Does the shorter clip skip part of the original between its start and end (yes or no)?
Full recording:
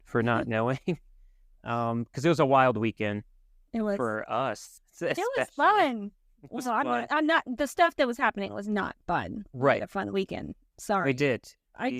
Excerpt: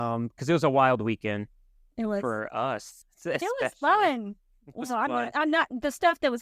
no